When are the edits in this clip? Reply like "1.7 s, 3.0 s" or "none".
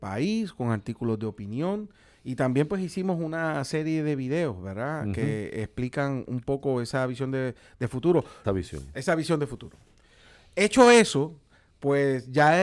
8.4 s